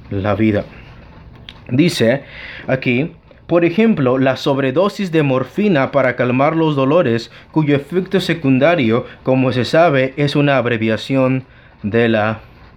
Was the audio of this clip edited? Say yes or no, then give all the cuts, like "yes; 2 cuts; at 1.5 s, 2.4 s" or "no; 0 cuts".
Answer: no; 0 cuts